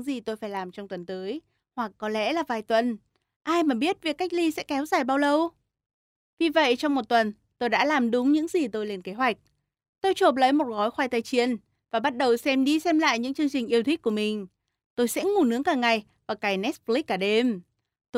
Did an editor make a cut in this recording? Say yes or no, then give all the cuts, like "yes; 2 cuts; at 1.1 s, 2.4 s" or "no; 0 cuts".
no; 0 cuts